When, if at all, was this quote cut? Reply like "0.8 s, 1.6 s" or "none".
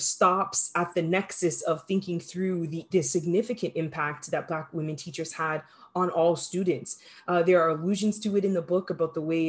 2.9 s